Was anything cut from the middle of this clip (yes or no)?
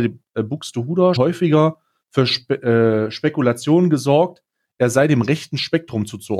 yes